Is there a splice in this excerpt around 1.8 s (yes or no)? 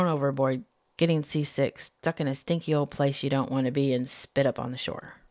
no